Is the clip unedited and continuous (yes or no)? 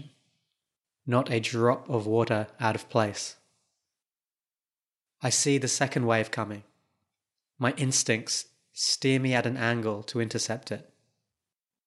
yes